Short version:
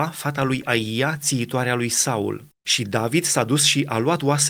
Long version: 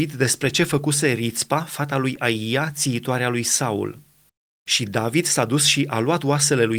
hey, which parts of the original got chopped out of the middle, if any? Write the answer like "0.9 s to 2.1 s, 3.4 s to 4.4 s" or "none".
4.1 s to 4.5 s